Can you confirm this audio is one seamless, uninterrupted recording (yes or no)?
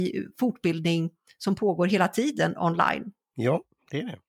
no